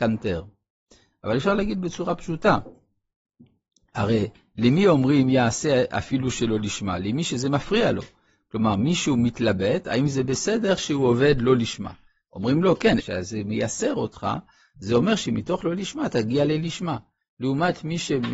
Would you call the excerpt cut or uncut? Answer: cut